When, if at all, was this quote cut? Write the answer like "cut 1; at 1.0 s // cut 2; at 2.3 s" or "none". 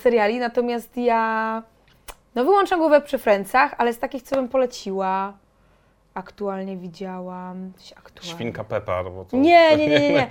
none